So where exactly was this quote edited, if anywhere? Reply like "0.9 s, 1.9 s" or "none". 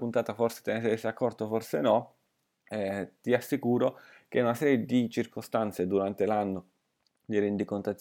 none